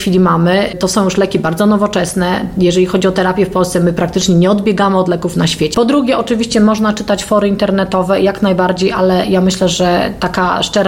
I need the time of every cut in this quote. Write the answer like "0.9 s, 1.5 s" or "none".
5.7 s